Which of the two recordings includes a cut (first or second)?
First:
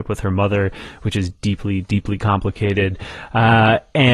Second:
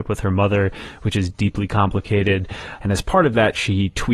second